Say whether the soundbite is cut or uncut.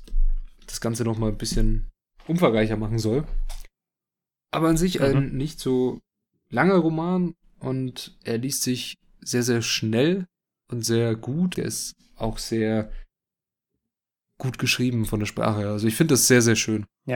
cut